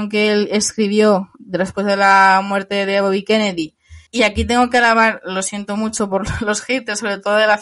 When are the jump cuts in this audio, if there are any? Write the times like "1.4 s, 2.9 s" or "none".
4.1 s